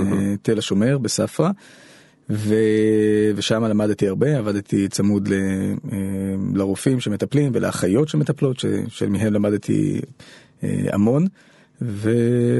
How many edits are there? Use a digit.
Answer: 0